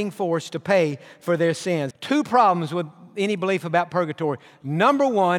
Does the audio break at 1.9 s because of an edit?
yes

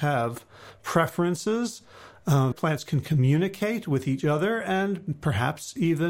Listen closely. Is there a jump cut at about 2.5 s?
yes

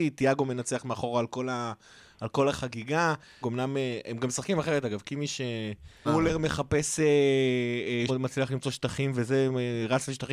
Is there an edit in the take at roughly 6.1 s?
yes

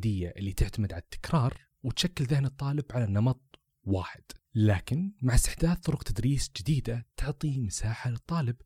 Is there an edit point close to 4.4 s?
yes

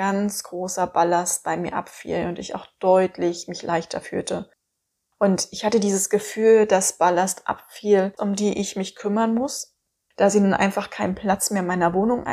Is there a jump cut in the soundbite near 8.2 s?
yes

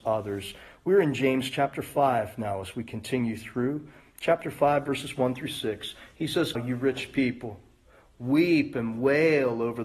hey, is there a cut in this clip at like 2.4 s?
no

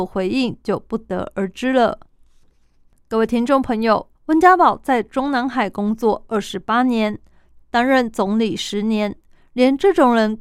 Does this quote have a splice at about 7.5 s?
no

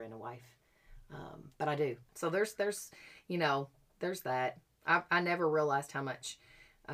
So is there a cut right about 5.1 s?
no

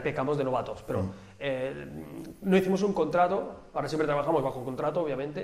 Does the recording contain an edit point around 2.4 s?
no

